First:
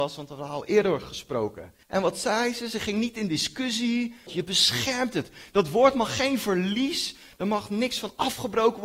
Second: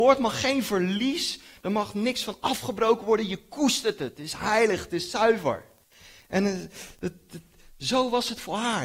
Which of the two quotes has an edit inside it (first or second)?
first